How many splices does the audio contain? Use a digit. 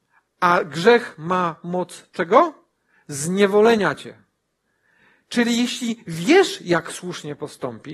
0